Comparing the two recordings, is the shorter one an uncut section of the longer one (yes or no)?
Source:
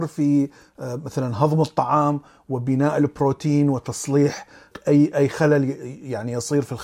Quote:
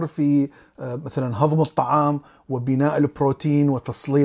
yes